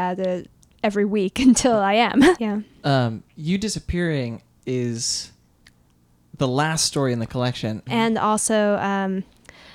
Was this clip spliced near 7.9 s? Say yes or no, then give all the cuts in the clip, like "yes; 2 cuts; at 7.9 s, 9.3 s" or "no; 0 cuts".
yes; 2 cuts; at 2.4 s, 7.9 s